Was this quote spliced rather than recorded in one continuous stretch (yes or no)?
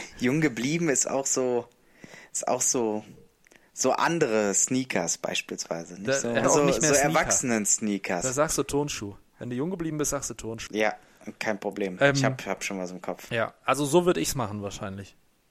yes